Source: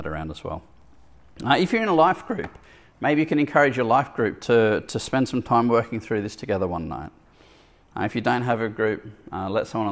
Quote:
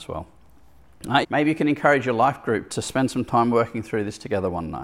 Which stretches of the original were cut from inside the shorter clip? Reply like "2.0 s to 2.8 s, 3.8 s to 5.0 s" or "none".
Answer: 1.6 s to 2.9 s, 4.4 s to 4.9 s